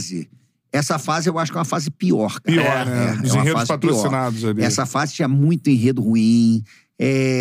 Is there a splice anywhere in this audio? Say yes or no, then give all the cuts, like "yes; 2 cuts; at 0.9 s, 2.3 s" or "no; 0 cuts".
no; 0 cuts